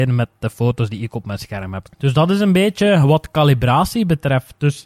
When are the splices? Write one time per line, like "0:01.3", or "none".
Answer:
0:01.8